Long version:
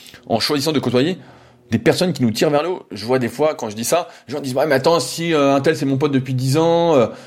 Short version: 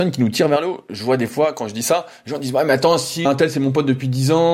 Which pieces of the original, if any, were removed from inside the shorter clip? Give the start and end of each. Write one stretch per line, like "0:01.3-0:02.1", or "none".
0:05.3-0:05.5